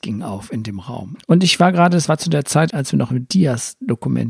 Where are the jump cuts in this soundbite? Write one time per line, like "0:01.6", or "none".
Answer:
0:01.2
0:02.7